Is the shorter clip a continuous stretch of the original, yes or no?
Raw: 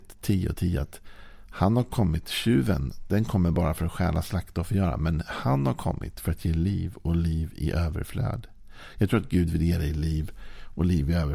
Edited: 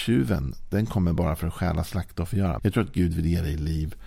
no